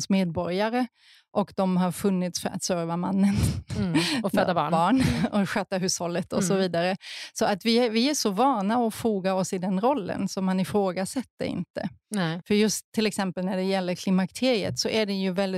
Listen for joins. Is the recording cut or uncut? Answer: cut